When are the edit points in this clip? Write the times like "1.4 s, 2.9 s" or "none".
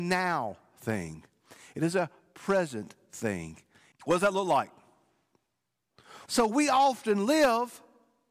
3.9 s, 6.3 s